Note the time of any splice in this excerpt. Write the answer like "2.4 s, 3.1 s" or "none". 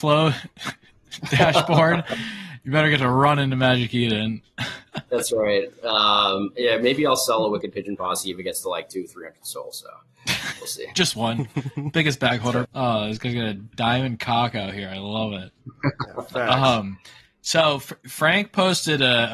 12.6 s